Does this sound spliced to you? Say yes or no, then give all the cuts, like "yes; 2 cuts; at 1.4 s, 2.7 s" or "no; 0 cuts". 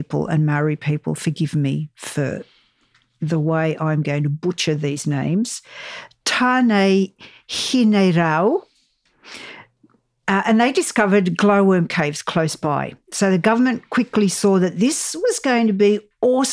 no; 0 cuts